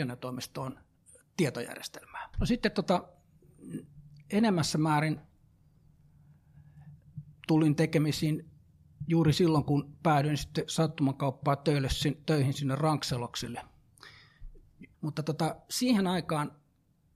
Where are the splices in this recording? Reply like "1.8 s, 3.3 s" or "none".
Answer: 2.3 s, 14.9 s